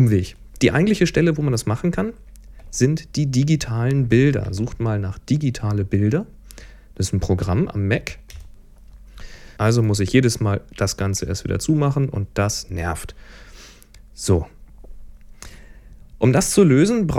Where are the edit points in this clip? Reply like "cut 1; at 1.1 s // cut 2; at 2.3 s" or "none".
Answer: cut 1; at 9.6 s